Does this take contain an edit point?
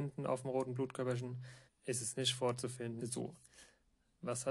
yes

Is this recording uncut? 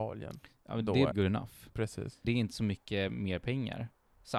no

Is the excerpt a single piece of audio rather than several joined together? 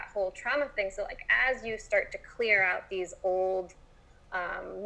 yes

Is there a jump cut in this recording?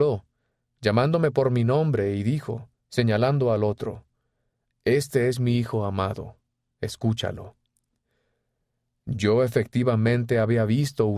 no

